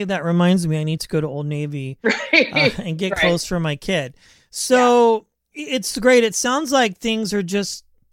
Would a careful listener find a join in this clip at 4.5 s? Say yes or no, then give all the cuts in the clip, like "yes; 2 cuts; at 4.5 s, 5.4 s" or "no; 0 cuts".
no; 0 cuts